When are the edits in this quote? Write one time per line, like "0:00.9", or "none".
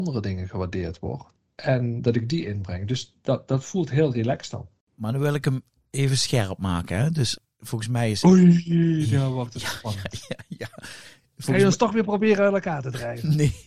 none